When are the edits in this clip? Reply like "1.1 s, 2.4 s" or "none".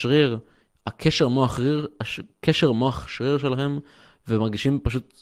none

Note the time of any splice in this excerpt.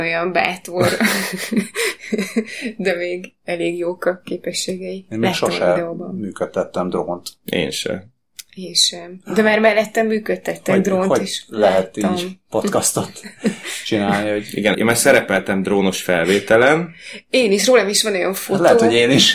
14.7 s

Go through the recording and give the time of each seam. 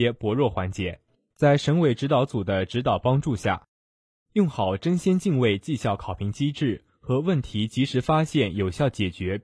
1.3 s

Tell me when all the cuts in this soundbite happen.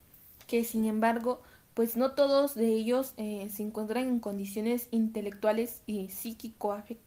none

